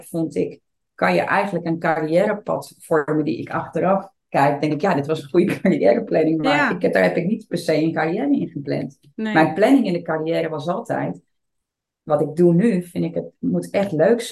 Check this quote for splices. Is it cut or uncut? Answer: uncut